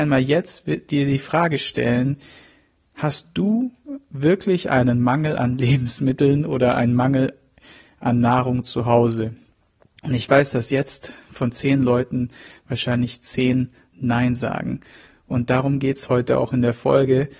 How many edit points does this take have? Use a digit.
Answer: 0